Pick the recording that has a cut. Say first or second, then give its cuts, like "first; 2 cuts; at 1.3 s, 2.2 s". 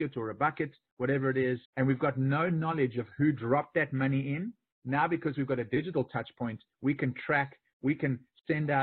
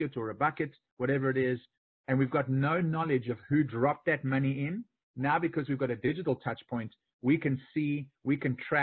first; 2 cuts; at 1.7 s, 6.7 s